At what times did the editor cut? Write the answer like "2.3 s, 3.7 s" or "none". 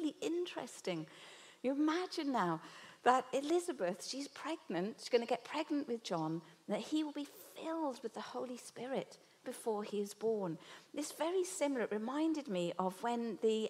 9.4 s